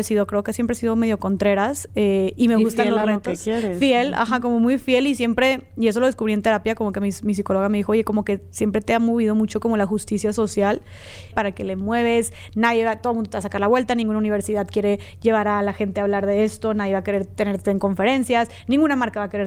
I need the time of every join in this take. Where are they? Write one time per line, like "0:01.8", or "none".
0:11.3